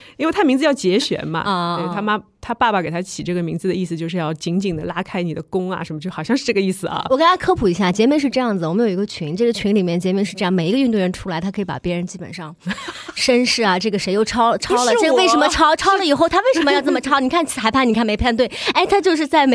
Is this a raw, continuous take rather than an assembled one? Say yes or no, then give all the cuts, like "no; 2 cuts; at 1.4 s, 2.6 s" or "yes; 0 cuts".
yes; 0 cuts